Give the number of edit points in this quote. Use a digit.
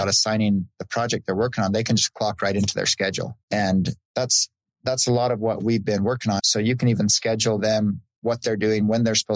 2